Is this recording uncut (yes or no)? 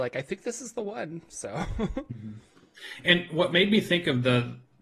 yes